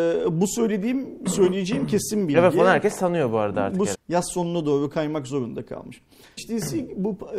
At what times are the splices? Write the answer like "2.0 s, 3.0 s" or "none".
3.9 s, 6.4 s